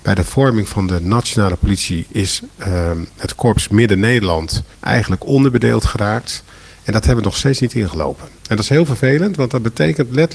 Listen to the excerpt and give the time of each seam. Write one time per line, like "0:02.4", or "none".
0:04.7